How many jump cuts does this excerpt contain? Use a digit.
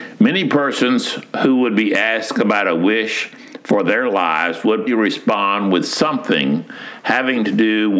1